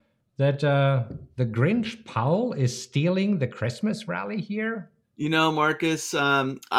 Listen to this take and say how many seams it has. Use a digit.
1